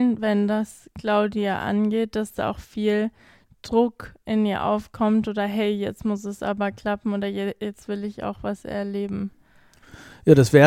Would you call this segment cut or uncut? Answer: uncut